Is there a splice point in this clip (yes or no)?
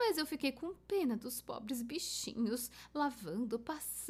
no